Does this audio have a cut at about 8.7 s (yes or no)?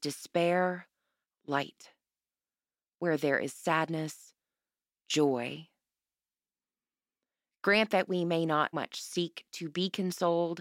yes